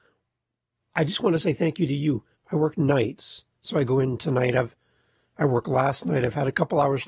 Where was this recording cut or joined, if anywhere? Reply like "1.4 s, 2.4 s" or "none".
2.3 s